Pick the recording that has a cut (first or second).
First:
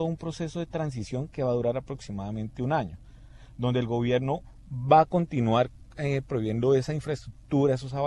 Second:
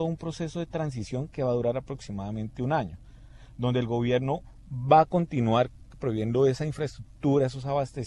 second